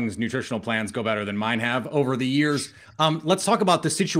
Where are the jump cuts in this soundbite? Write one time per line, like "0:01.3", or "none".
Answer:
none

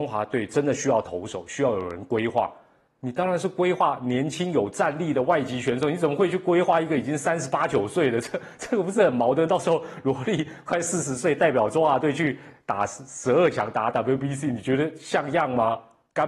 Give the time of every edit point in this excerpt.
none

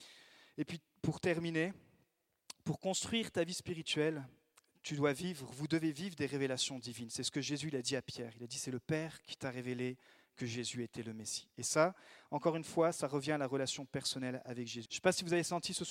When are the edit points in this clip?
0:14.9

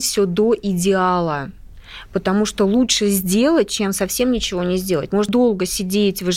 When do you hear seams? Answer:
0:05.3

